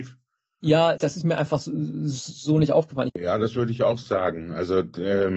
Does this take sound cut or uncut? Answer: cut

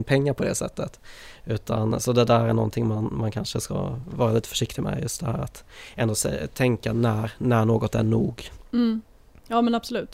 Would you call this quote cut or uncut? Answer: uncut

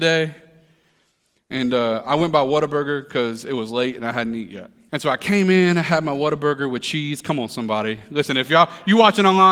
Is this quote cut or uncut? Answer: cut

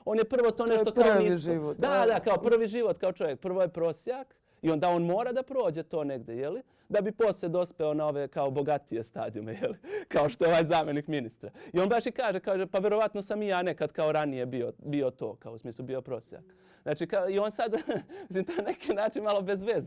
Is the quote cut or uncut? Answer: uncut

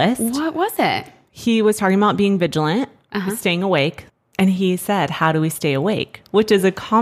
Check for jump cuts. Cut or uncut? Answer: uncut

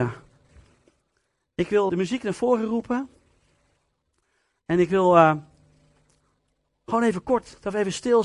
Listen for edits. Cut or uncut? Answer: cut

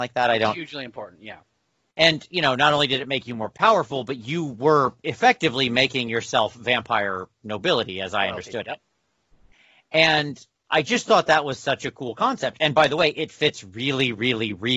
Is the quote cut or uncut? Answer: uncut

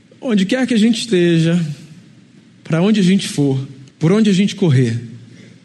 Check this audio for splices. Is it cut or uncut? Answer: cut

